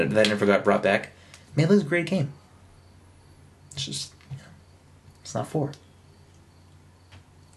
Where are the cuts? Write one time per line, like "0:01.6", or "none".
none